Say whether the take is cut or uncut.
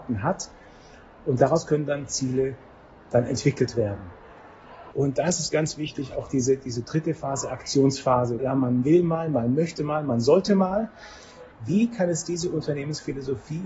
cut